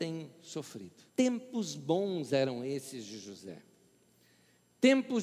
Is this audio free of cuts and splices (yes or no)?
no